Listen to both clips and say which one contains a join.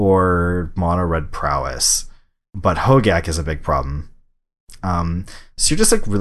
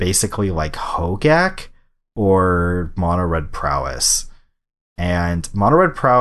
first; 2 cuts; at 2.5 s, 4.8 s

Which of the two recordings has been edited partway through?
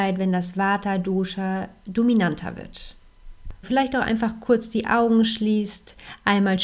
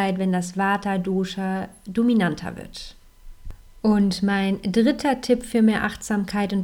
first; 1 cut; at 3.6 s

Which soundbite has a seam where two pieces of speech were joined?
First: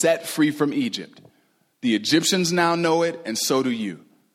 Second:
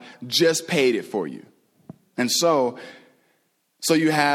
second; 1 cut; at 2.2 s

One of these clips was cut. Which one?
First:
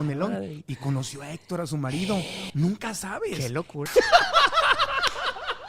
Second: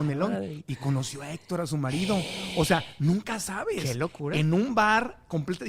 first; 2 cuts; at 2.5 s, 3.9 s

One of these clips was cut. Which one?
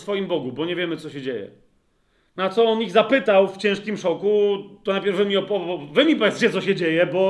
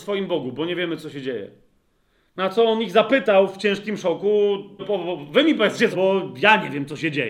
second; 2 cuts; at 4.8 s, 5.9 s

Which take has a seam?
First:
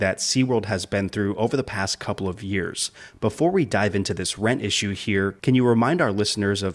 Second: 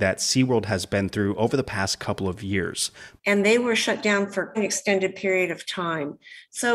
second; 2 cuts; at 3.2 s, 4.5 s

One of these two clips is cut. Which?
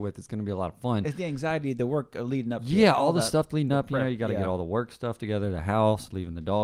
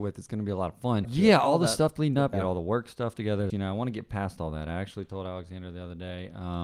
second; 3 cuts; at 1.0 s, 2.3 s, 3.5 s

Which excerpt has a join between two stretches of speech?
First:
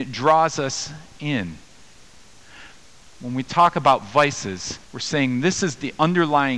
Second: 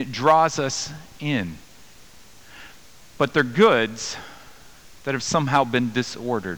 first; 2 cuts; at 3.0 s, 4.8 s

